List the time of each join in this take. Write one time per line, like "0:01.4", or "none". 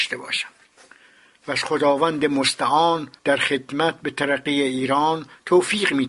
0:03.2